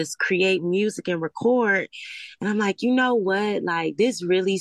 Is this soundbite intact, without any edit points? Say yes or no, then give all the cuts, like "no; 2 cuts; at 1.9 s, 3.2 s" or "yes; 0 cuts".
yes; 0 cuts